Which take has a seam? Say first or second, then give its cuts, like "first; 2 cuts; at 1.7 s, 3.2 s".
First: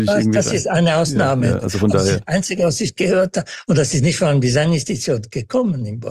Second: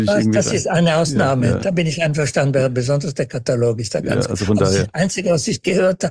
first; 1 cut; at 1.6 s